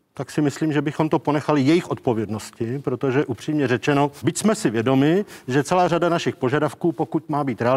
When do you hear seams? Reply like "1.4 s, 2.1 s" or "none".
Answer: 4.2 s